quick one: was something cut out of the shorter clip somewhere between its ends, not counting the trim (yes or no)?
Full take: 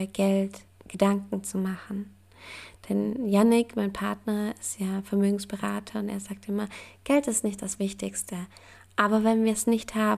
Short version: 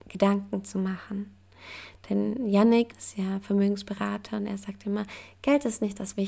yes